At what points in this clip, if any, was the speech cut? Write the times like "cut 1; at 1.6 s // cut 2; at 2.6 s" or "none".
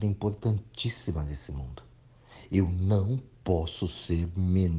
none